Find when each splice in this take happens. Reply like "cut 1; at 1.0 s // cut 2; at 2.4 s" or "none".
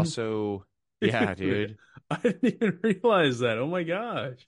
cut 1; at 1.0 s